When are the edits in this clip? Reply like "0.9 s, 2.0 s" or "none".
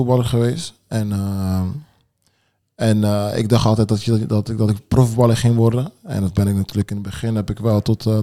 none